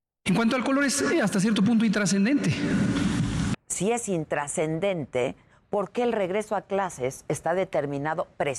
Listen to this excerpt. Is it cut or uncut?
cut